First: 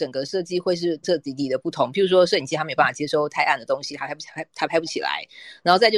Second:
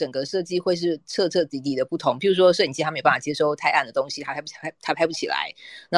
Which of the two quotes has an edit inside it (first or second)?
first